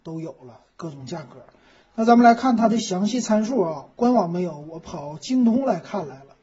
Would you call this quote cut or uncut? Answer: uncut